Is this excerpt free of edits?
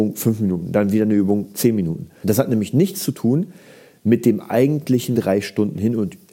no; 2 cuts; at 2.2 s, 5.1 s

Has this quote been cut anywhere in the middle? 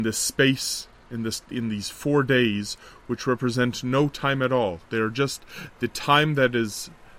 no; 0 cuts

